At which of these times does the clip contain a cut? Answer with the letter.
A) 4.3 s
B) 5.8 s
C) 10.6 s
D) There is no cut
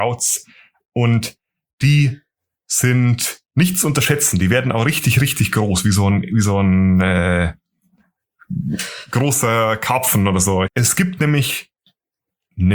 C